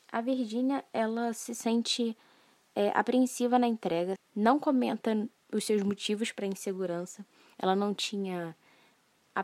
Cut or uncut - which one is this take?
cut